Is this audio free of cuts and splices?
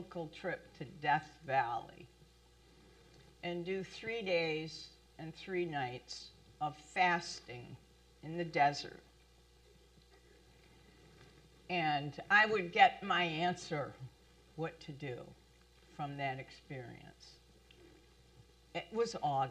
yes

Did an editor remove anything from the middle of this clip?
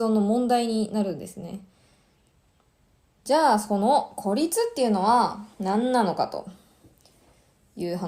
yes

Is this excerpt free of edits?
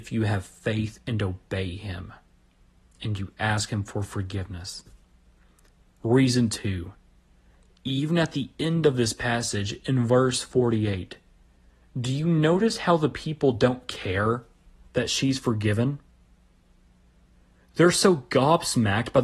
yes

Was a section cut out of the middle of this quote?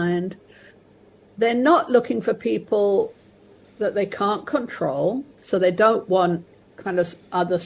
no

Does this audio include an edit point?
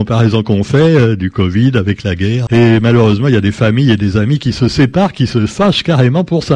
yes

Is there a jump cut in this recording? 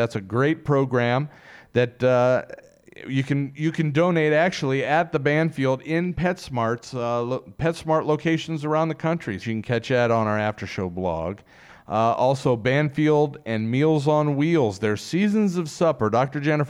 yes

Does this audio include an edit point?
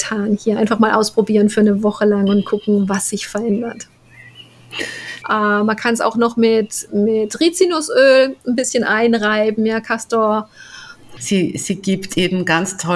yes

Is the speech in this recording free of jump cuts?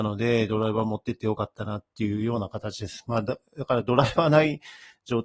yes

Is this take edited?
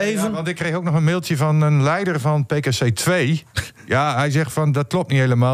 no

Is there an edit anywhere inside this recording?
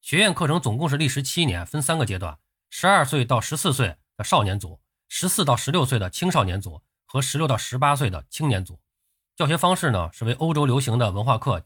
no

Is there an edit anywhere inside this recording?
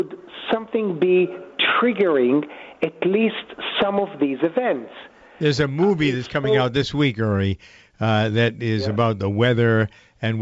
no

